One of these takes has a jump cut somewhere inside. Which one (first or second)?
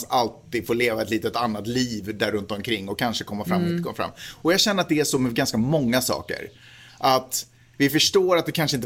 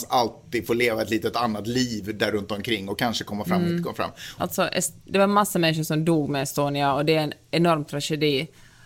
second